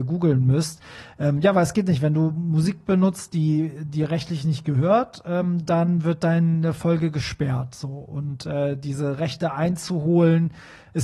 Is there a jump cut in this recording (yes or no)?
no